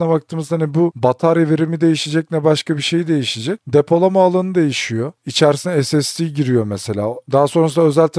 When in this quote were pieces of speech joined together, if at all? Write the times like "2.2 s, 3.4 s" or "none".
3.6 s